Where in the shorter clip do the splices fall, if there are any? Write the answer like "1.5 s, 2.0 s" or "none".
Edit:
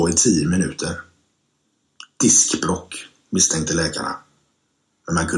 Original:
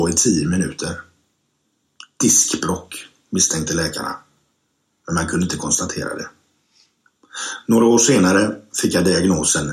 none